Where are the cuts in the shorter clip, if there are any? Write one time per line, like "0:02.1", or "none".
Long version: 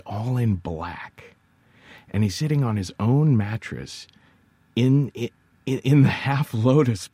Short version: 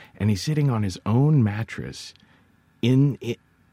none